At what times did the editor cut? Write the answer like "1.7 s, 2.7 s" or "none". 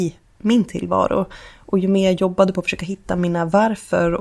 none